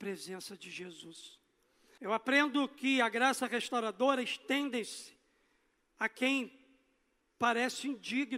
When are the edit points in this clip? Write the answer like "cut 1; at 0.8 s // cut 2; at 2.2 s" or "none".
cut 1; at 2.0 s